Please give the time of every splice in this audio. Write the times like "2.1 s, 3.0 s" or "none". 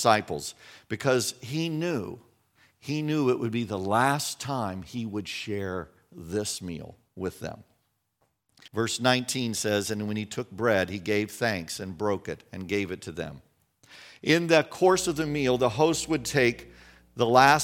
8.7 s